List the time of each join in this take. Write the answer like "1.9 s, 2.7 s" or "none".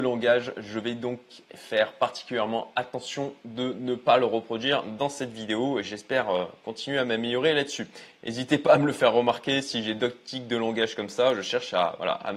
none

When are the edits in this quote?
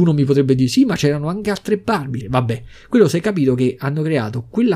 2.2 s

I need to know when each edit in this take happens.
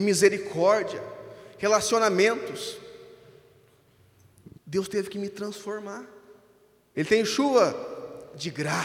4.5 s, 6.9 s

